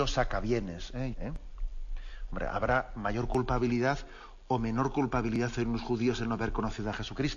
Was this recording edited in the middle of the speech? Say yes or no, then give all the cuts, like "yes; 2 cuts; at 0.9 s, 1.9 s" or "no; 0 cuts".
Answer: yes; 1 cut; at 1.1 s